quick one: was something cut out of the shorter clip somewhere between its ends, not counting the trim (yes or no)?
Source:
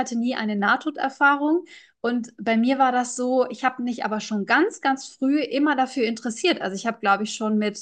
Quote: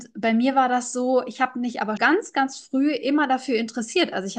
yes